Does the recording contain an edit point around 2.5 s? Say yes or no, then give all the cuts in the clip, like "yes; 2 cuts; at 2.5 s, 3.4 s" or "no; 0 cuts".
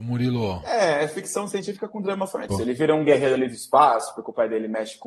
yes; 1 cut; at 2.5 s